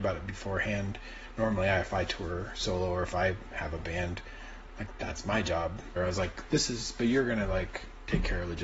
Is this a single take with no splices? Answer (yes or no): no